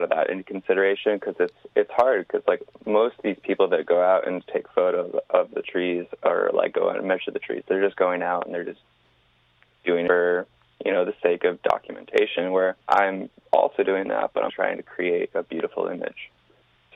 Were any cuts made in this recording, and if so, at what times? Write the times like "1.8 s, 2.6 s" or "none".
12.8 s, 14.5 s